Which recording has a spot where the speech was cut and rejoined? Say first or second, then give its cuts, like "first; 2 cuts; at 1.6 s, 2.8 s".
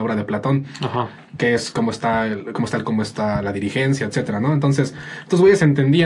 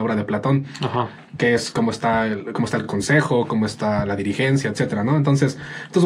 first; 1 cut; at 2.8 s